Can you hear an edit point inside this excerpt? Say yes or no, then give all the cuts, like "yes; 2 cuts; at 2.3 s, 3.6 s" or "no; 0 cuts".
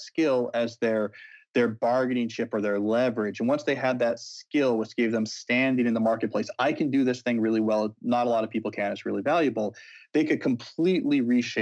no; 0 cuts